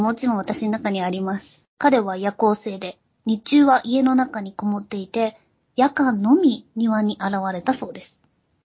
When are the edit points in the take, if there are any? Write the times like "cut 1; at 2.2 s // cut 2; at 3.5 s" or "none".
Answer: cut 1; at 1.7 s